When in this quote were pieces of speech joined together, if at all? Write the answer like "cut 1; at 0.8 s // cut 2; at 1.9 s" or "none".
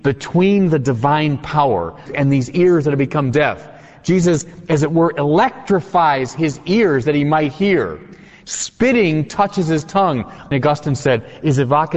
cut 1; at 2.1 s // cut 2; at 10.5 s